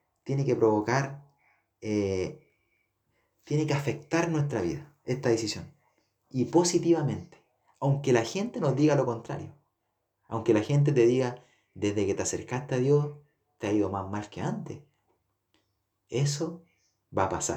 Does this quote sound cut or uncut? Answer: uncut